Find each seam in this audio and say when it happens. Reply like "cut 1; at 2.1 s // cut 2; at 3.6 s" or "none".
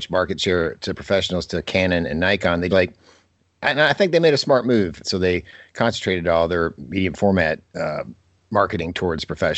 cut 1; at 2.7 s // cut 2; at 5.0 s